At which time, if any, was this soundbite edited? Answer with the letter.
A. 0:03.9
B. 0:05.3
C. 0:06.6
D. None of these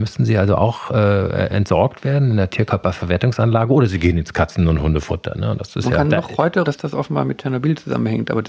C